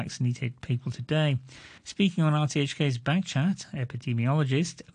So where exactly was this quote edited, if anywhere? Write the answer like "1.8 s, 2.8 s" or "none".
1.8 s